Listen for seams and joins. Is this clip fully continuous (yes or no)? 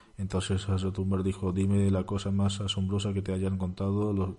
yes